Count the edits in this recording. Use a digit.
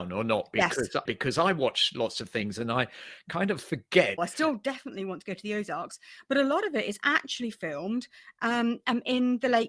2